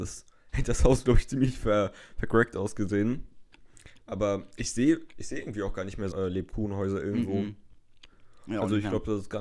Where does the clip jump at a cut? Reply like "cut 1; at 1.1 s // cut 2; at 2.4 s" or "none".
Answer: cut 1; at 6.1 s